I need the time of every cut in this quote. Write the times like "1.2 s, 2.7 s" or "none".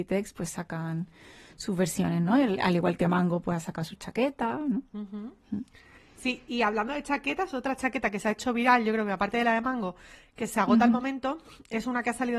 none